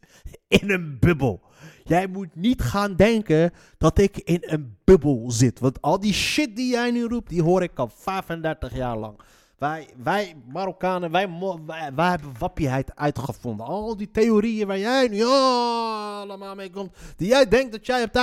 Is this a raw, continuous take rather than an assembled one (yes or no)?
yes